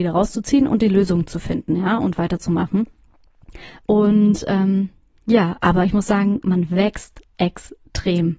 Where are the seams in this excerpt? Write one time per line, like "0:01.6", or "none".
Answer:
0:03.8